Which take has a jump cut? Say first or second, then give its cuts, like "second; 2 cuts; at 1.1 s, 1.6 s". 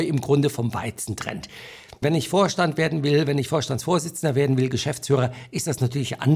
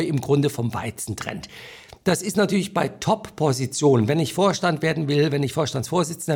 first; 1 cut; at 2.0 s